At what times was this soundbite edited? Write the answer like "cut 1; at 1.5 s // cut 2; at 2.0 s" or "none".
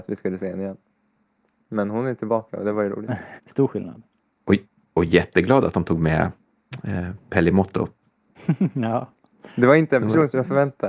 cut 1; at 3.4 s